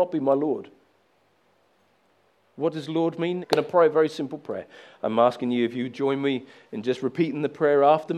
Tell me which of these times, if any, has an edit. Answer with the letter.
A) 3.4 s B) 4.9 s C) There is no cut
A